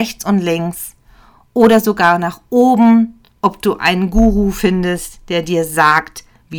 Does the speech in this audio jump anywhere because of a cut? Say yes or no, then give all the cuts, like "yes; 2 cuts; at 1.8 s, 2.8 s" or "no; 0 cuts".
no; 0 cuts